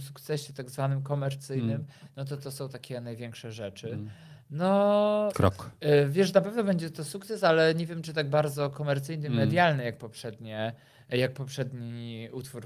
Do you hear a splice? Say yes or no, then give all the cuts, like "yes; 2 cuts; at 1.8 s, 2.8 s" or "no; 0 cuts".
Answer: yes; 1 cut; at 5.3 s